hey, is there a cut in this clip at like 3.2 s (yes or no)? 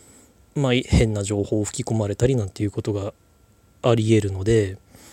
no